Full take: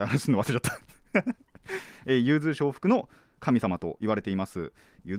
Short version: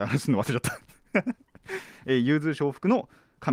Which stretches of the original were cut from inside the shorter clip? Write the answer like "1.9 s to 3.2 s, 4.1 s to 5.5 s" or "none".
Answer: none

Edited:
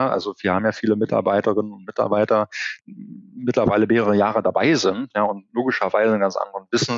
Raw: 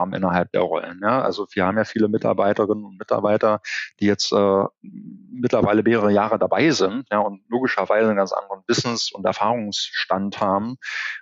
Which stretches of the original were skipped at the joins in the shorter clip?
3.9 s to 4.8 s

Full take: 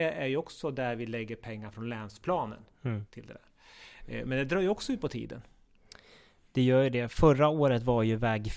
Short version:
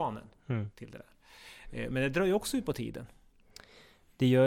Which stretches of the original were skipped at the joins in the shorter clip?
none

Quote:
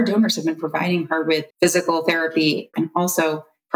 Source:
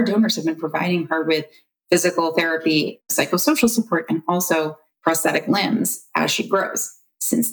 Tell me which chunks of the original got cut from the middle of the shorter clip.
1.5 s to 1.8 s, 3.0 s to 4.1 s

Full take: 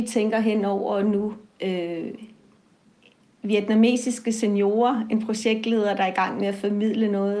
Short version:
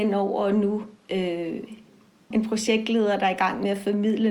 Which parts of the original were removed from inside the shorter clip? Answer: 2.8 s to 5.1 s

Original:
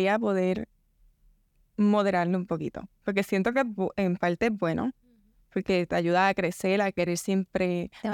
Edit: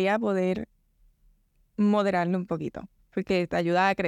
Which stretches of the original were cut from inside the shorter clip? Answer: 3.0 s to 5.4 s

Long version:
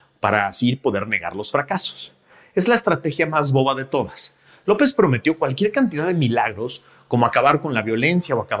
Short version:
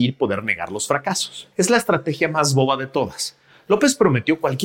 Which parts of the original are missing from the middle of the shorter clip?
2.2 s to 2.5 s

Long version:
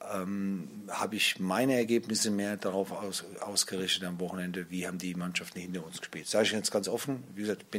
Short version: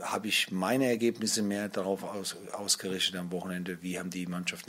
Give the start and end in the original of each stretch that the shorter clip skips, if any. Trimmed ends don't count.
none

